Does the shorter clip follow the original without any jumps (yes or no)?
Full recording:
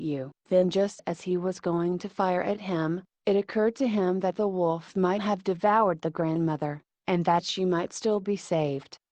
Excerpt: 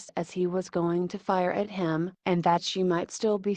no